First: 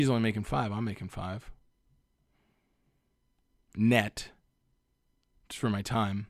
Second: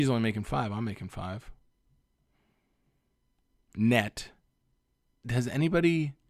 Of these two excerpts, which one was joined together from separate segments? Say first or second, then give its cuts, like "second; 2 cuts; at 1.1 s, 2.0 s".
second; 1 cut; at 5.2 s